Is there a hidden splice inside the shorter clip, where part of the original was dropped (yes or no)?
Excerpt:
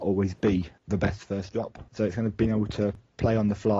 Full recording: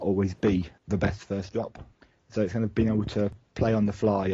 yes